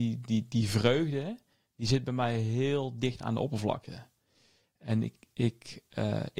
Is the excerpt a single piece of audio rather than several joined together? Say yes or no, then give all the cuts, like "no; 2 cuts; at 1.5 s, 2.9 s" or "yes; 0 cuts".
yes; 0 cuts